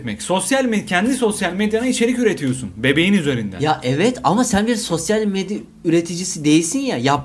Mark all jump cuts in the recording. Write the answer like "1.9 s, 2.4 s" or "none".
none